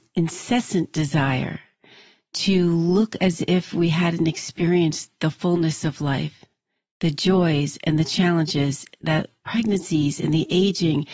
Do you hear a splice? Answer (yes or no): no